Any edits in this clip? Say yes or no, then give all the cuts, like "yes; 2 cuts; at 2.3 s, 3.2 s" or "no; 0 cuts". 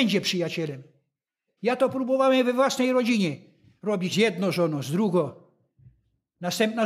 yes; 2 cuts; at 1.6 s, 4.1 s